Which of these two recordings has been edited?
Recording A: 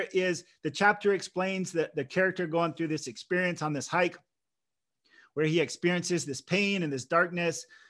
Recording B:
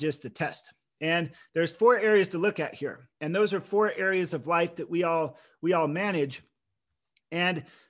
B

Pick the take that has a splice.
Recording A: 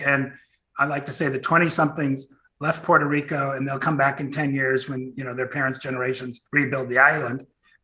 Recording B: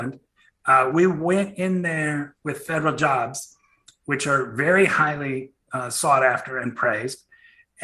A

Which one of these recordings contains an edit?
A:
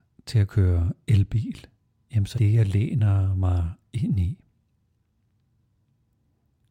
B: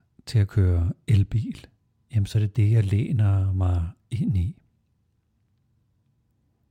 A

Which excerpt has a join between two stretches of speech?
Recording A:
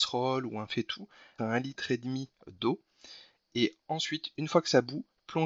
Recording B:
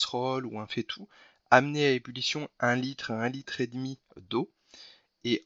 A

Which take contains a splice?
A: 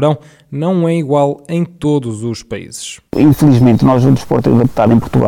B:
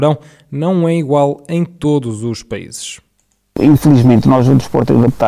A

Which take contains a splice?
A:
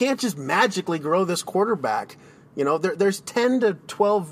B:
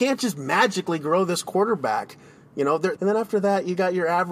B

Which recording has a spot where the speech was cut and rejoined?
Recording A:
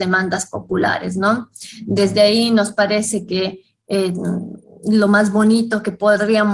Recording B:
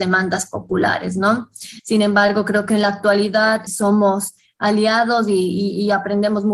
B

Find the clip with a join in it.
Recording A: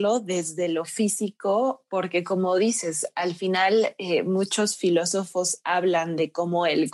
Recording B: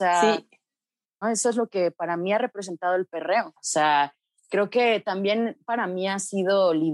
B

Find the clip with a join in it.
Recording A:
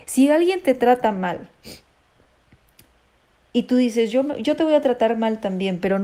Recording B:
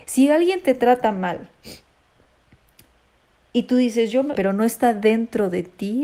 B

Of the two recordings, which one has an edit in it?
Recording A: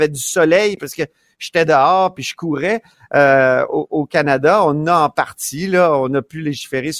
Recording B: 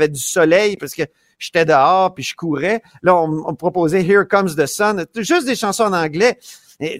A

